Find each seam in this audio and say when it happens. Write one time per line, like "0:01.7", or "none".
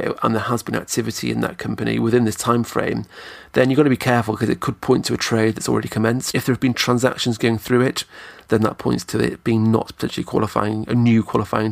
0:06.3